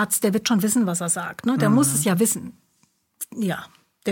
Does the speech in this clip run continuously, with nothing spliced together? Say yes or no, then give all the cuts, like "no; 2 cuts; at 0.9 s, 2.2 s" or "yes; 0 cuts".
yes; 0 cuts